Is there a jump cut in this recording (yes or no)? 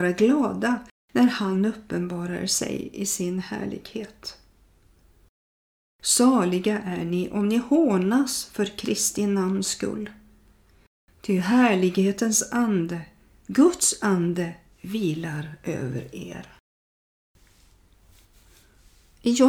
no